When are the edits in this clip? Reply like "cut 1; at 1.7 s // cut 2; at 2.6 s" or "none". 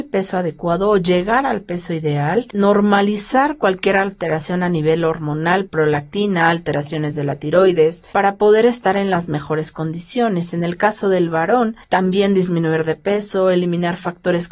cut 1; at 5.7 s // cut 2; at 8.1 s

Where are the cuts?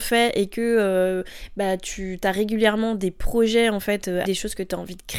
cut 1; at 4.2 s

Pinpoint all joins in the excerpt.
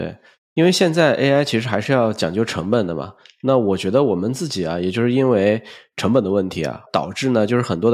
none

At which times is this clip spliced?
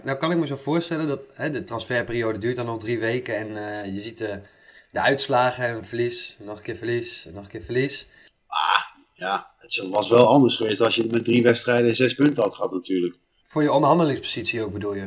cut 1; at 8.3 s

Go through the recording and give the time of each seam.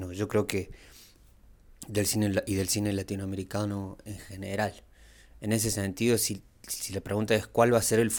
none

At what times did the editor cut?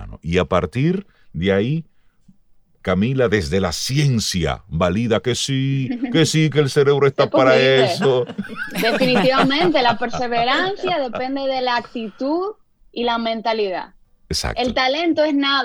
none

